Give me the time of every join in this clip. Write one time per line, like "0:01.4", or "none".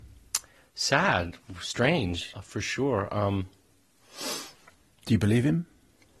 0:02.3